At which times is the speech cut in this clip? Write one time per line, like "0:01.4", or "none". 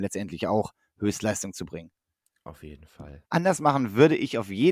0:03.2